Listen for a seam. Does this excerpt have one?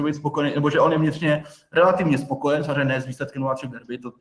no; 0 cuts

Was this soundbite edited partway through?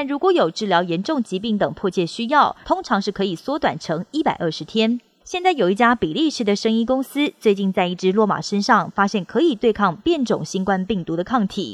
yes; 2 cuts; at 2.6 s, 5.2 s

